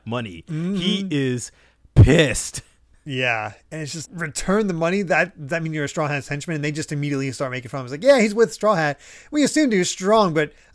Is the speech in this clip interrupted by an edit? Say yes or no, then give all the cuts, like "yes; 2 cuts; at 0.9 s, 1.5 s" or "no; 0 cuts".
yes; 1 cut; at 4.0 s